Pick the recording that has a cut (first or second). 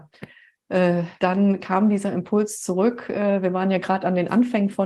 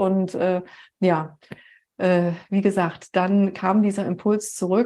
first